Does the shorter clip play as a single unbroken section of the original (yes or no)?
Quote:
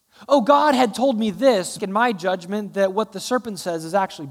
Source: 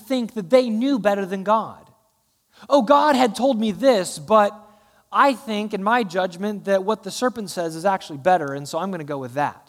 no